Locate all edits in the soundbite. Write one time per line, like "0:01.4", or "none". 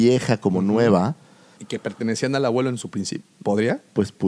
0:01.6
0:03.2